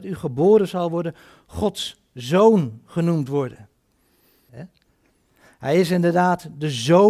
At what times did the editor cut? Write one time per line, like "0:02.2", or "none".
0:04.5